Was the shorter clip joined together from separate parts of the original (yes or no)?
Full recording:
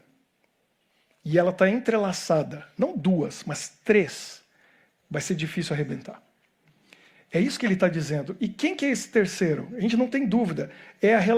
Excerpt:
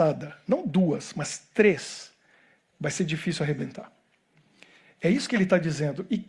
no